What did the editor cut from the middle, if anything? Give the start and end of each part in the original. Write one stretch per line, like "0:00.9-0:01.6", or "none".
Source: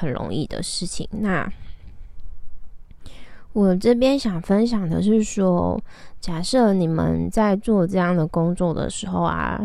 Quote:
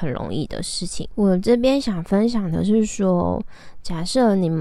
0:01.1-0:03.5